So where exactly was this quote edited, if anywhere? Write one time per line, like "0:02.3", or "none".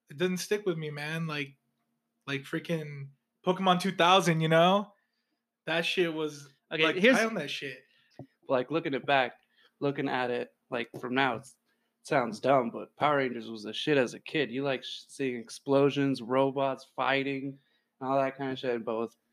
0:08.1